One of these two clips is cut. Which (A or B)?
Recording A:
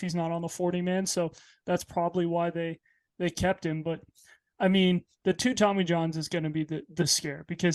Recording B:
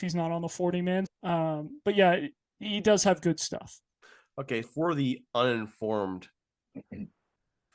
B